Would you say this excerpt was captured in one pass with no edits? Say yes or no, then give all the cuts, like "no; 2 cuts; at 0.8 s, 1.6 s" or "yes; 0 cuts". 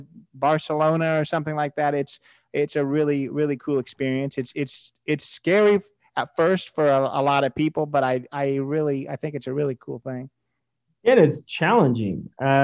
yes; 0 cuts